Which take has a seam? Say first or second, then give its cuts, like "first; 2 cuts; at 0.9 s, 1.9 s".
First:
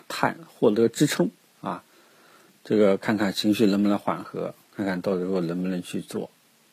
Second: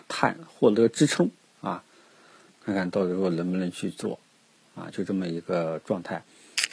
second; 1 cut; at 2.5 s